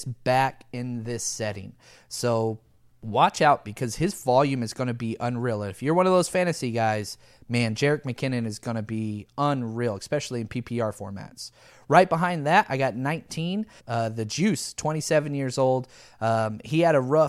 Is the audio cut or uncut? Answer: cut